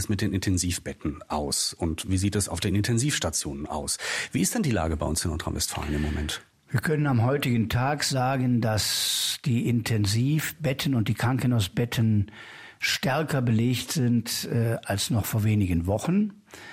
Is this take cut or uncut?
uncut